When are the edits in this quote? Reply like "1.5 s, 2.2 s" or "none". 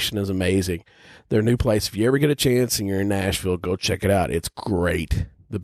none